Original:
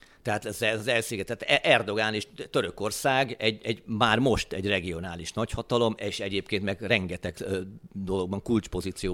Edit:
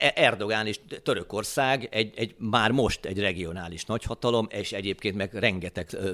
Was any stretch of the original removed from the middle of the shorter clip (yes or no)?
no